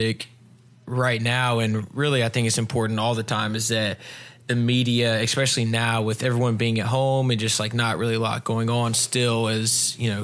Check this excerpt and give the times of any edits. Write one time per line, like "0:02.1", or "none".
none